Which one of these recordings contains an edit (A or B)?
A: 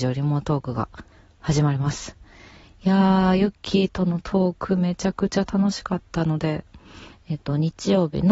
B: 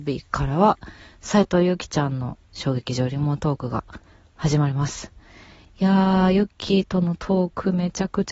A